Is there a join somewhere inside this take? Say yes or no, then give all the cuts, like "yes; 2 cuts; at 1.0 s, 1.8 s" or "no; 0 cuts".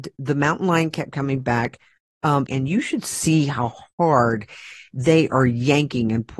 yes; 1 cut; at 2.5 s